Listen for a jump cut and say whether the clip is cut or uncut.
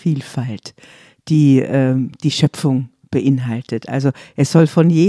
uncut